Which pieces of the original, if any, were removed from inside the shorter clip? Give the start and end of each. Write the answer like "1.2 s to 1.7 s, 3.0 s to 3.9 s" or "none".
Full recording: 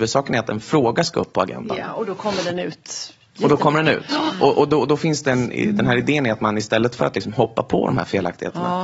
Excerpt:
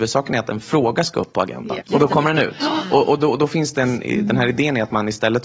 1.8 s to 3.3 s